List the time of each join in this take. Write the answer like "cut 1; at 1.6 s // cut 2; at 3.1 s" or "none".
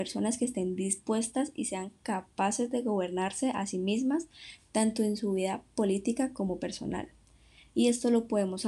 none